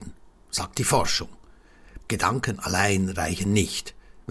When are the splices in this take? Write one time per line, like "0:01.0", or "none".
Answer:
0:02.0